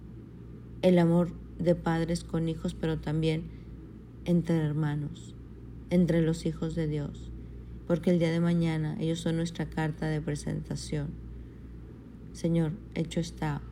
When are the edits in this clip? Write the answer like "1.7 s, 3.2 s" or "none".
7.8 s, 12.3 s